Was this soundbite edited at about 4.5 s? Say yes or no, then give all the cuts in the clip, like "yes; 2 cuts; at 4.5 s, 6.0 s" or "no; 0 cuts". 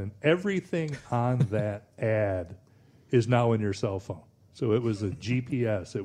no; 0 cuts